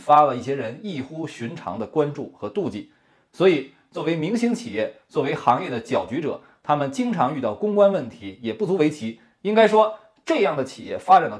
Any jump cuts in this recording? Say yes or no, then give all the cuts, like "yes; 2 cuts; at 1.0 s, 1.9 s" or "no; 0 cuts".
no; 0 cuts